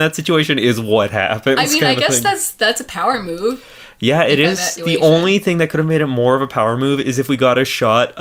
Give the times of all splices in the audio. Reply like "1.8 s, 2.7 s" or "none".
4.8 s